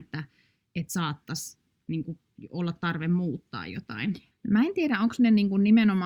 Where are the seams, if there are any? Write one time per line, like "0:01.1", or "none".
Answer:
0:04.3